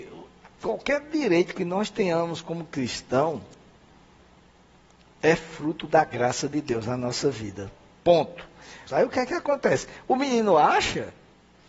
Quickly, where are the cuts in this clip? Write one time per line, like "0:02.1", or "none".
0:08.9